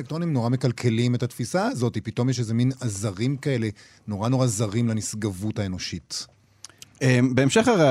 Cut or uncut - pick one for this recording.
uncut